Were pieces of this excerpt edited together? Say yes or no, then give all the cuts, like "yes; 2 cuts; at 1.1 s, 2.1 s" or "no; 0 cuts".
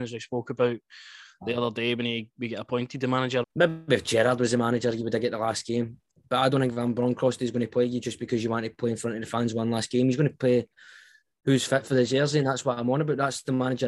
yes; 1 cut; at 3.4 s